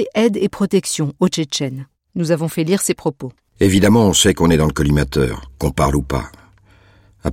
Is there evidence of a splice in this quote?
yes; 1 cut; at 2.0 s

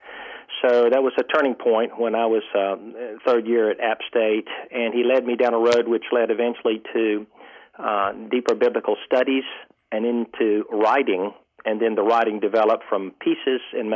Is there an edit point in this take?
no; 0 cuts

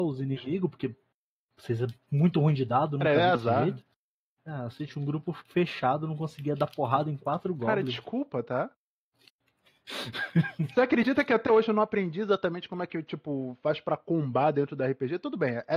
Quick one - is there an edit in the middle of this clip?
no; 0 cuts

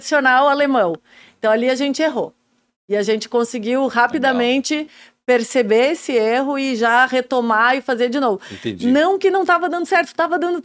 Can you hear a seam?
no; 0 cuts

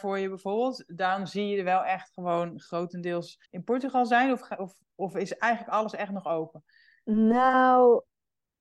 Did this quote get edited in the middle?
yes; 1 cut; at 3.5 s

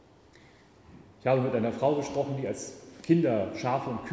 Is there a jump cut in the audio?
yes; 1 cut; at 1.1 s

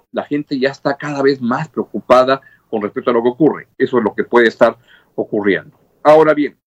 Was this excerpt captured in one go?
no; 1 cut; at 3.7 s

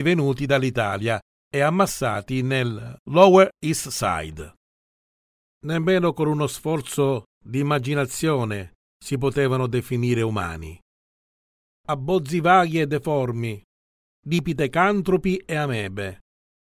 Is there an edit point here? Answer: no; 0 cuts

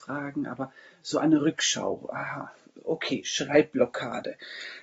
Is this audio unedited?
yes; 0 cuts

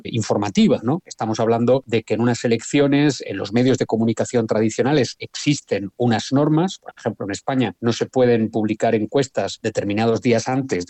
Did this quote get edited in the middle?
no; 0 cuts

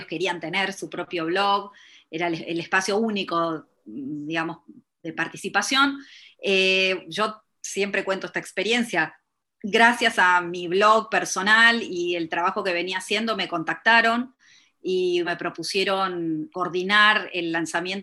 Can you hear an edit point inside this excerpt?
yes; 2 cuts; at 15.2 s, 16.5 s

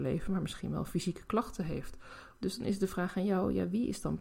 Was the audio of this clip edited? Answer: yes; 1 cut; at 2.4 s

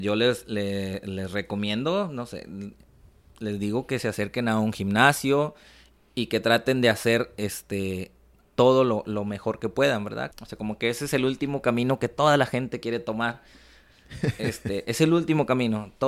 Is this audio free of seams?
no; 1 cut; at 10.3 s

